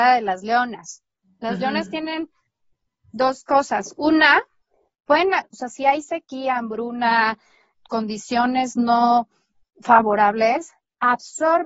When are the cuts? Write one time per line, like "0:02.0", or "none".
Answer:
none